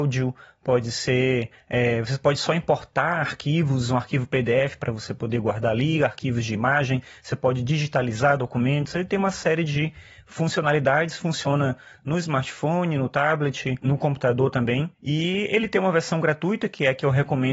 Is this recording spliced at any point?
no; 0 cuts

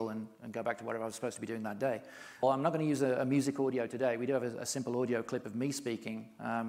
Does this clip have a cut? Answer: yes; 1 cut; at 2.4 s

